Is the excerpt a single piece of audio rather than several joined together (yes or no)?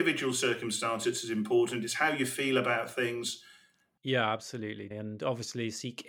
no